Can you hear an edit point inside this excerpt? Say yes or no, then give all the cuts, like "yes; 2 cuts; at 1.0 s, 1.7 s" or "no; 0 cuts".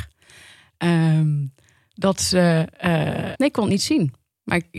yes; 1 cut; at 3.3 s